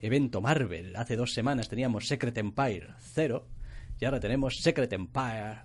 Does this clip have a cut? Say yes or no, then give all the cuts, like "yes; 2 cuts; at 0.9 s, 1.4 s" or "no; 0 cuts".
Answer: no; 0 cuts